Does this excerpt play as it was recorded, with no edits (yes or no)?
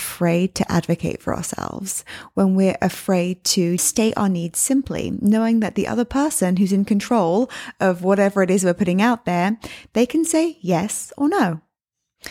no